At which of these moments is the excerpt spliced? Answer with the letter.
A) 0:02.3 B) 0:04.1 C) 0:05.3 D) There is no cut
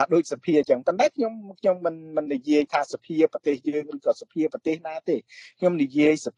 A